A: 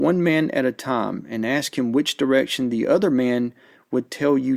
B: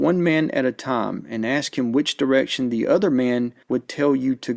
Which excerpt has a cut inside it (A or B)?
B